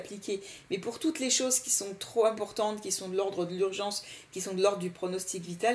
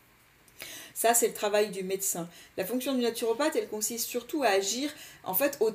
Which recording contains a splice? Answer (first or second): second